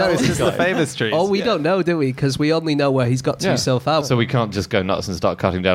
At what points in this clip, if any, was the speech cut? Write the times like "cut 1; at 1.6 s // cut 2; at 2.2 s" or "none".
cut 1; at 4.0 s

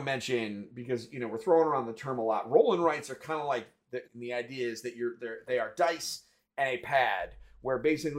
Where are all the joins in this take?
cut 1; at 4.1 s

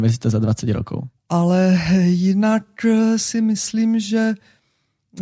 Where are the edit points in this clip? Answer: cut 1; at 1.2 s

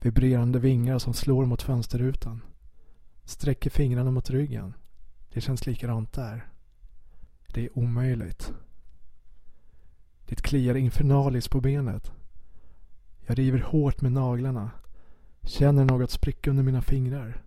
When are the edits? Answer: cut 1; at 3.2 s // cut 2; at 7.4 s

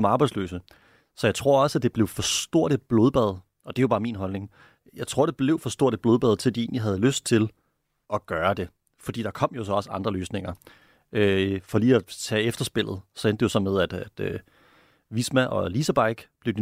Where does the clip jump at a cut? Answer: cut 1; at 8.1 s

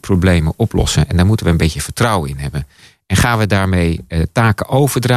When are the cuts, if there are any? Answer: none

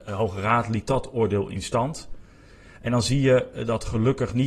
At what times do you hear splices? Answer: none

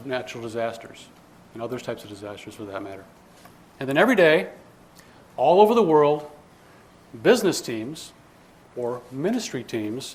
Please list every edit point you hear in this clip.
cut 1; at 3.7 s

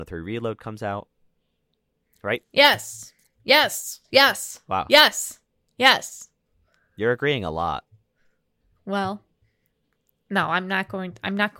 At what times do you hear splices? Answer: none

